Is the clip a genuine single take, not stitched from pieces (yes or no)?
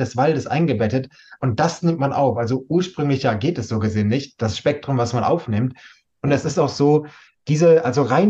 yes